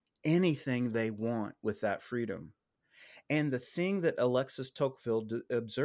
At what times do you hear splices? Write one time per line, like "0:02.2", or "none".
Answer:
none